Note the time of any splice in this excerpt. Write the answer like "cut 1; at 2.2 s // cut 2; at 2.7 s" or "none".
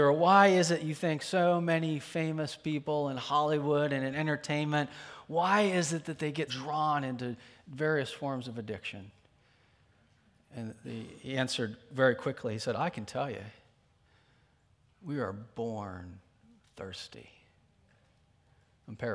cut 1; at 6.5 s